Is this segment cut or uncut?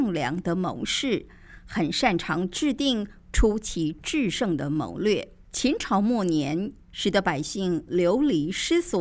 cut